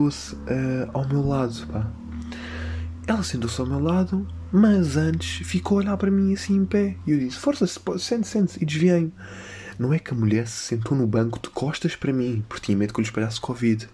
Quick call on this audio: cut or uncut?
uncut